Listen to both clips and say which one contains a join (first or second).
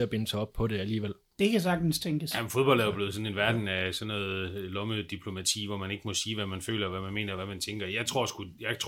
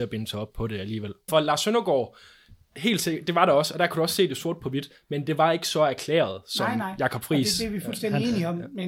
second